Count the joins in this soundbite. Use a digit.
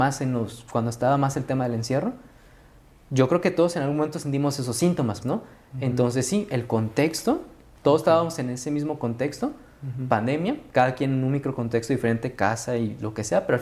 1